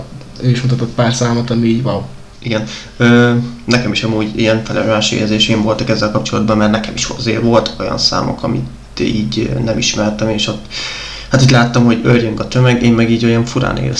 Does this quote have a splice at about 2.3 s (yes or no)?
yes